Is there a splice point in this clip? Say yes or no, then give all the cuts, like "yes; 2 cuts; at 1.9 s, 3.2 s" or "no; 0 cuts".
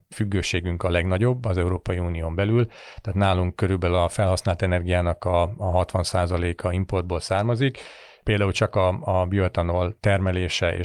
no; 0 cuts